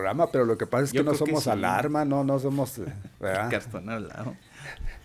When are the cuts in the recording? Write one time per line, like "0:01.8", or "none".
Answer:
none